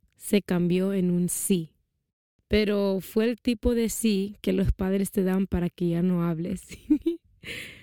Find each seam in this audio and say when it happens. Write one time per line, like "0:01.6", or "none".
none